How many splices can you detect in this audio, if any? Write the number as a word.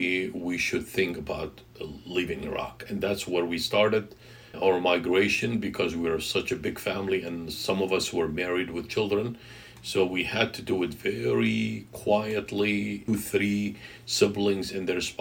one